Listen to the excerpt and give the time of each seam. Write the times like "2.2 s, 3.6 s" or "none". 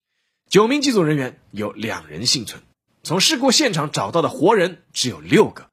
2.9 s

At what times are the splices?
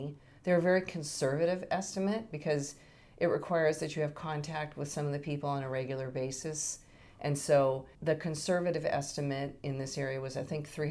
8.0 s

